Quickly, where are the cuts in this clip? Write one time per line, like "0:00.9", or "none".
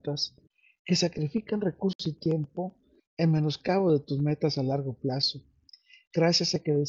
none